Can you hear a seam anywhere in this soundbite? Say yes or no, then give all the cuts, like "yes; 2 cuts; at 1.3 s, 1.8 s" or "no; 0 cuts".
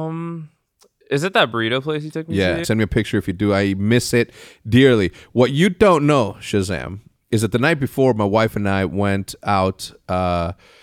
yes; 1 cut; at 2.6 s